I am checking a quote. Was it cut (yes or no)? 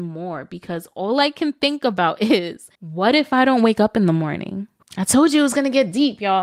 yes